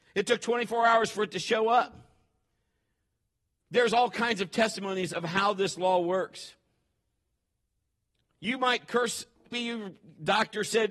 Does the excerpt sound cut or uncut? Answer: cut